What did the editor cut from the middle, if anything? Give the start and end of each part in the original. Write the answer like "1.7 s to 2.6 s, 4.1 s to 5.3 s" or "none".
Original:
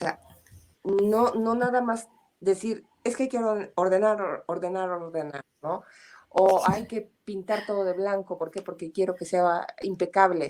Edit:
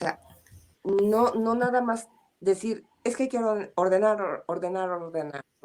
none